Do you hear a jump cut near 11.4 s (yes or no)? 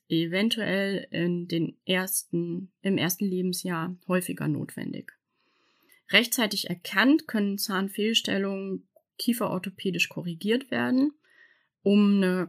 no